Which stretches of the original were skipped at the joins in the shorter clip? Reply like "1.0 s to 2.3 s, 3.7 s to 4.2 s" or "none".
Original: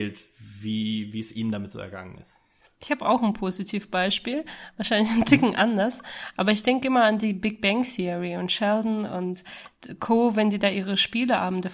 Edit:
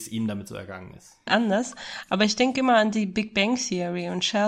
2.5 s to 5.5 s